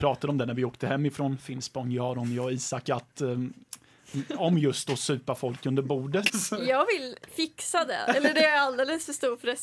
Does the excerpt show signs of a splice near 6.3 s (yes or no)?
yes